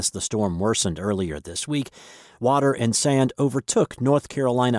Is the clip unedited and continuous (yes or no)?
yes